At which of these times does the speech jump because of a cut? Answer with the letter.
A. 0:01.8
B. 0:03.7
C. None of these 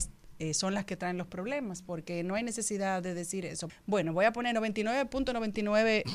B